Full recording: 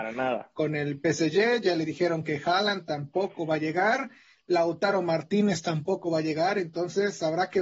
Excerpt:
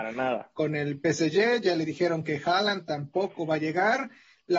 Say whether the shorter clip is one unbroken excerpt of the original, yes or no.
yes